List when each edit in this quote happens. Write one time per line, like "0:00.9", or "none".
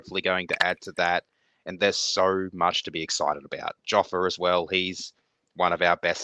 none